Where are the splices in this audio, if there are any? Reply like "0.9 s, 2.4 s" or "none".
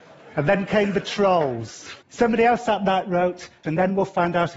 2.0 s, 3.6 s